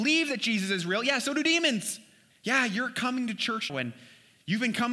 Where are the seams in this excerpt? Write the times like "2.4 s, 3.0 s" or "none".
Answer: 2.3 s, 3.7 s